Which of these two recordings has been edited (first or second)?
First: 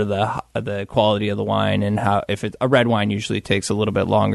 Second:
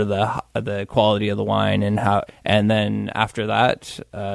second